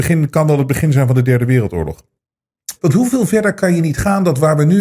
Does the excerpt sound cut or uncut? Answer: cut